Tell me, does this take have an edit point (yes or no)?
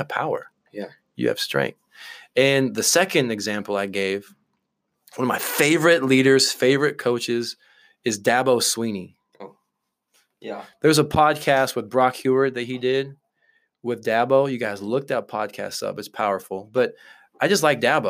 no